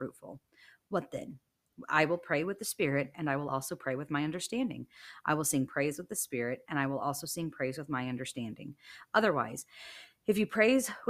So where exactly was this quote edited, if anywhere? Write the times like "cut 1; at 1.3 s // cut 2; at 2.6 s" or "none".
none